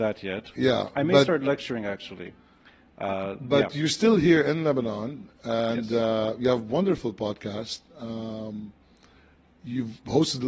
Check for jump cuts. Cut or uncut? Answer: uncut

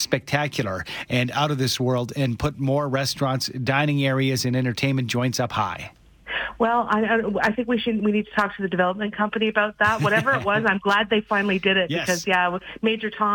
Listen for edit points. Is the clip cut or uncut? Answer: uncut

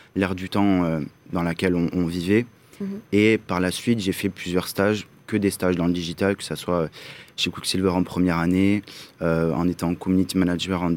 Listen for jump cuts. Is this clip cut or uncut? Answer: uncut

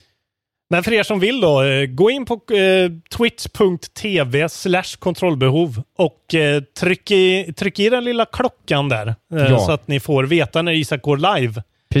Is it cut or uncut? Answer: uncut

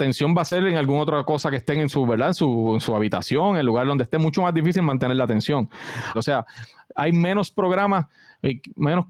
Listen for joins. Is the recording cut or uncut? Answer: cut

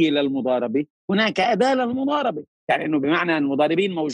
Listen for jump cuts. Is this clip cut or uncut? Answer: cut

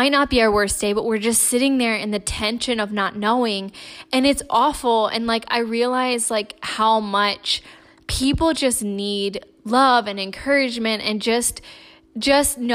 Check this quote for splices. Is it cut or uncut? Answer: uncut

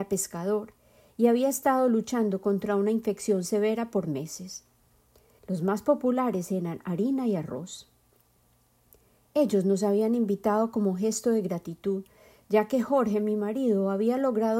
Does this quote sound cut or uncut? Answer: cut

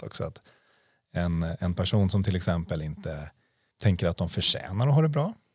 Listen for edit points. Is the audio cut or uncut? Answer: cut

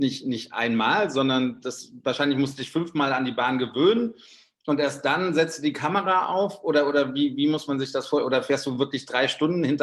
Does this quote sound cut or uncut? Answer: uncut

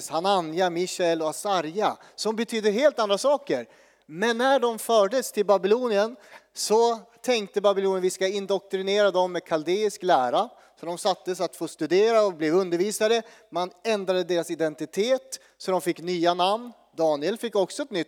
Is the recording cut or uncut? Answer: uncut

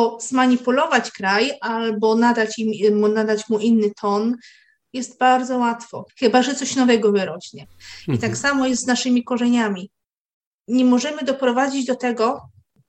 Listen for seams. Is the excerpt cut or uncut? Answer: cut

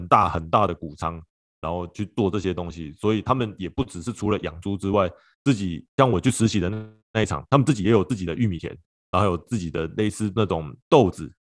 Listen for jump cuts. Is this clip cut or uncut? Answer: uncut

